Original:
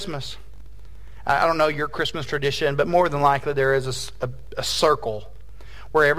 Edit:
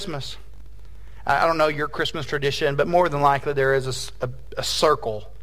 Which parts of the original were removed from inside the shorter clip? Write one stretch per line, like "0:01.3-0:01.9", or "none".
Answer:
none

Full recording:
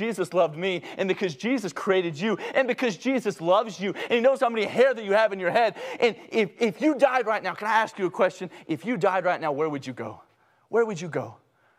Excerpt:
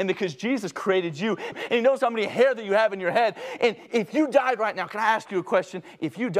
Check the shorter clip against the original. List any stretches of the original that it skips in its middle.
0:02.5-0:03.9
0:06.3-0:06.5

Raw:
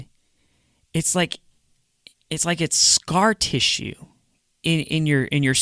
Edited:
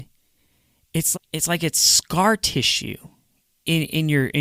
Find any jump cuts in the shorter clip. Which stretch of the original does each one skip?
0:01.1-0:02.1

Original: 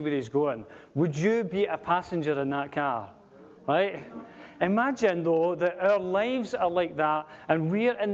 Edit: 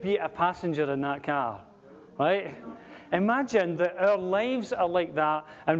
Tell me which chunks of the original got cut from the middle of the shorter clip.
0:05.2-0:05.6

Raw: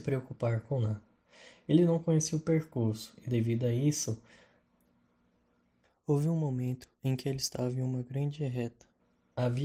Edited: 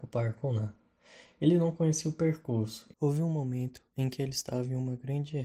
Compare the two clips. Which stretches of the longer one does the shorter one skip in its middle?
0:03.2-0:06.0

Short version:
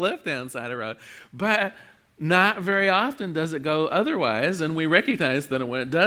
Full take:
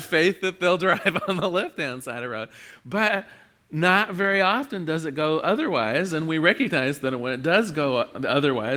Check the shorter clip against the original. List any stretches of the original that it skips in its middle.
none

